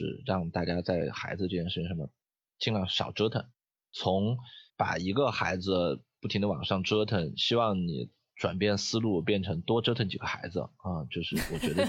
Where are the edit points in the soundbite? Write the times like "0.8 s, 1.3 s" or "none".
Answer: 4.7 s